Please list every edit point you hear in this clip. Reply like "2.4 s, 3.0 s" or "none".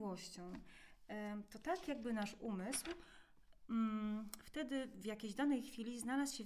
none